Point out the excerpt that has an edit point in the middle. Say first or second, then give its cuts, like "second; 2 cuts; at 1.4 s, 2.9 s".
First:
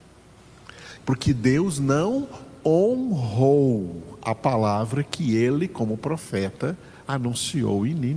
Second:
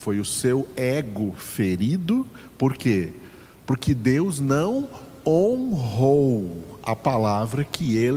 first; 1 cut; at 1.0 s